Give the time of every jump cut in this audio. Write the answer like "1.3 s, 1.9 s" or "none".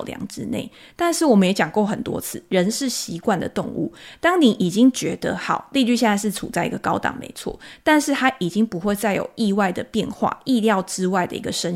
none